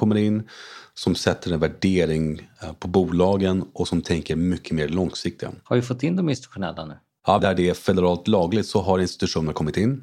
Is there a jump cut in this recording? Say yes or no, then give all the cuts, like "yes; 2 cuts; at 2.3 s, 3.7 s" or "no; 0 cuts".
yes; 1 cut; at 7.4 s